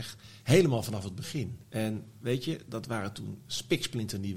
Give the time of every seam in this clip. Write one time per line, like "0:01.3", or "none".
0:01.6